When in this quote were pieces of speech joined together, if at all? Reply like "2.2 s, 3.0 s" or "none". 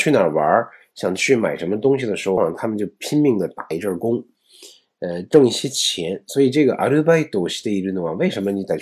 2.4 s